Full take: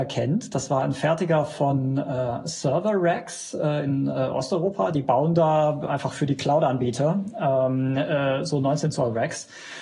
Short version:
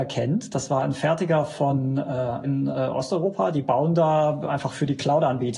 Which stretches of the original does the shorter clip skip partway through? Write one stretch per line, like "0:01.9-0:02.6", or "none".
0:02.4-0:03.8